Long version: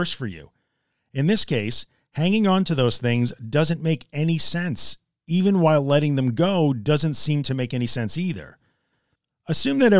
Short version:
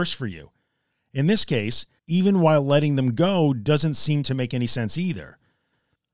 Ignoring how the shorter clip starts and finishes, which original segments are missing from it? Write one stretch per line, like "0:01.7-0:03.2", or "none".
0:02.0-0:05.2